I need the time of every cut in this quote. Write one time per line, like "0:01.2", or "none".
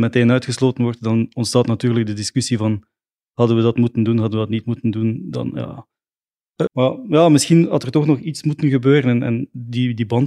0:06.7